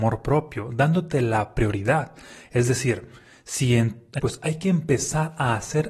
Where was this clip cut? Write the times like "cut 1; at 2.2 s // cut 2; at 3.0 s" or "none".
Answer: cut 1; at 4.2 s